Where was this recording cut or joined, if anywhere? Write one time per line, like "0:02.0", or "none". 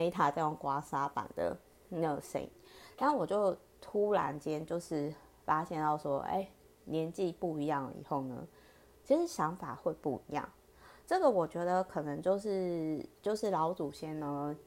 none

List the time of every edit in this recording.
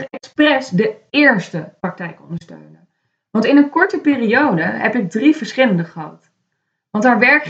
none

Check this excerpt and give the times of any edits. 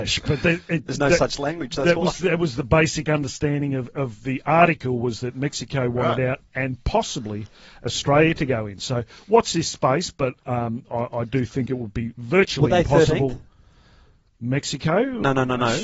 none

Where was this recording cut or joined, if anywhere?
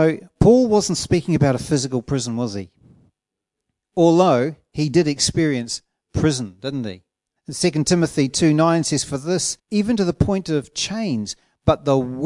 0:07.4
0:09.6

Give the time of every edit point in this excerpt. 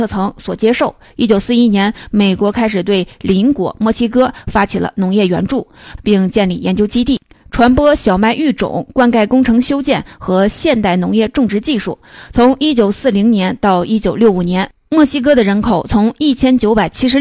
0:06.0

